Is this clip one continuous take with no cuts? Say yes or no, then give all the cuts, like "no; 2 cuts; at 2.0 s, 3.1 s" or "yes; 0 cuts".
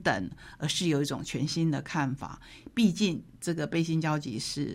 yes; 0 cuts